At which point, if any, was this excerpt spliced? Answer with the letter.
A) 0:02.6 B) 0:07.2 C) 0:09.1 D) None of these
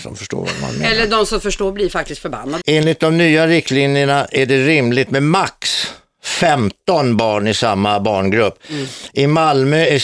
A